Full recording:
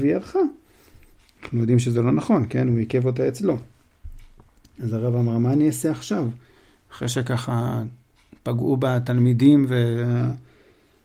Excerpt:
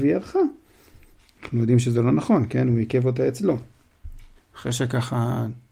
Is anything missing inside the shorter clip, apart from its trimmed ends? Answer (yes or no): yes